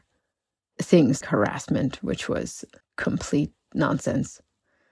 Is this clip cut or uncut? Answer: cut